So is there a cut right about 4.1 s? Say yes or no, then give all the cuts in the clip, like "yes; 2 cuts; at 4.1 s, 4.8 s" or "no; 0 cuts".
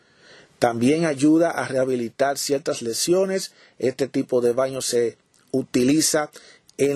no; 0 cuts